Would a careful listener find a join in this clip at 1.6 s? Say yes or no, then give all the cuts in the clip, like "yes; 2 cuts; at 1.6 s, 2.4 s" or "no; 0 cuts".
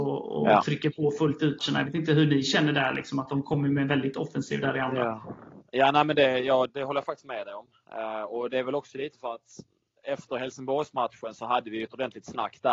yes; 2 cuts; at 1.6 s, 6.7 s